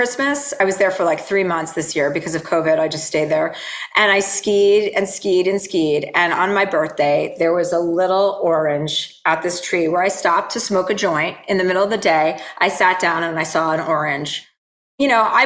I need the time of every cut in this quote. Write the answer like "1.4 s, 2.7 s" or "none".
none